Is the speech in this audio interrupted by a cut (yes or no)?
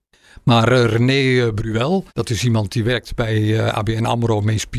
yes